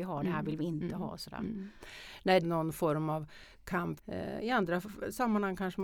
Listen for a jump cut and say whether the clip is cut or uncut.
cut